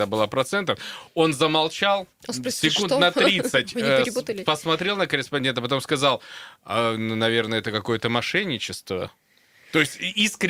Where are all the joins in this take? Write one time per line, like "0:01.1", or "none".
none